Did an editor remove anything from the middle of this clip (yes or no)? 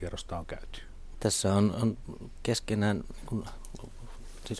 yes